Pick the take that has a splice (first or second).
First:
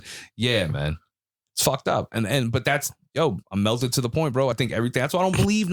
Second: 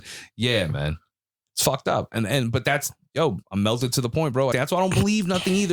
second